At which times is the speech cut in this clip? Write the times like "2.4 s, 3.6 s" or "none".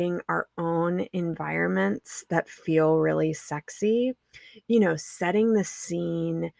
none